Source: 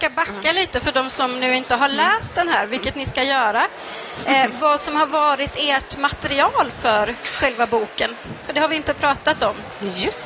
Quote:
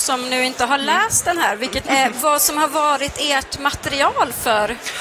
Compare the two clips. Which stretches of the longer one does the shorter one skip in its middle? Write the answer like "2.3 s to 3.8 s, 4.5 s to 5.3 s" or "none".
3.0 s to 4.2 s